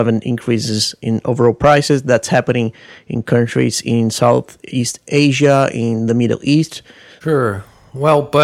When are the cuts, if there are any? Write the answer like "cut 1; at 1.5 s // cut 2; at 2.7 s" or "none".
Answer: cut 1; at 7.2 s